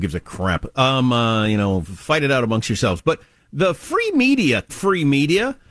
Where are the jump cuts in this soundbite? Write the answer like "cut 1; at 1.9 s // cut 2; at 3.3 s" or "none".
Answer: cut 1; at 4.7 s